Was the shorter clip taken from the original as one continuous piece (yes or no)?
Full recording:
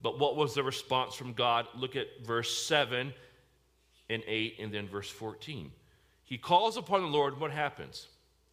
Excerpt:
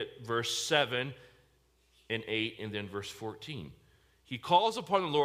yes